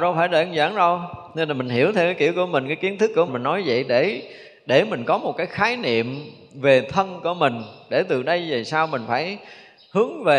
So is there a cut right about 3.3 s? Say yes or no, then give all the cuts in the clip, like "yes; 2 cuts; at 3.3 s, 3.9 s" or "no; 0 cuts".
yes; 1 cut; at 3.3 s